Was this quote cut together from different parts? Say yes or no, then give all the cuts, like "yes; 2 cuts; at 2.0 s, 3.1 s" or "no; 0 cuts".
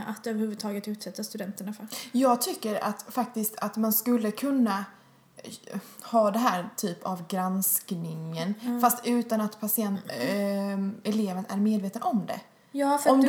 no; 0 cuts